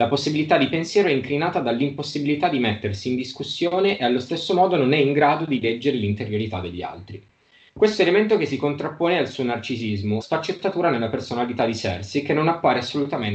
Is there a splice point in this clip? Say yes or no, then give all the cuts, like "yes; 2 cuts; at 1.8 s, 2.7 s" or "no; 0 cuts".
yes; 2 cuts; at 7.7 s, 10.2 s